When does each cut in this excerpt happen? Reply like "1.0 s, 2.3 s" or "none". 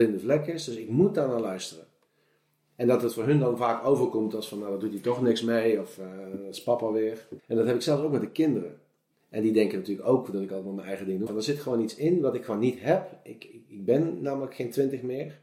7.4 s, 11.3 s